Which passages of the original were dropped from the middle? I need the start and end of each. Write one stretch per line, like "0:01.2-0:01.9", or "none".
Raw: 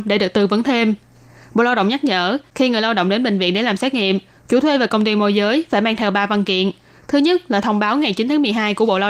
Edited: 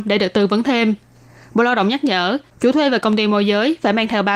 0:02.5-0:04.4